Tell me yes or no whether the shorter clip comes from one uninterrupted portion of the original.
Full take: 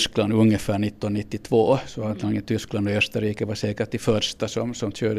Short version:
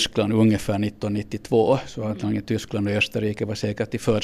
yes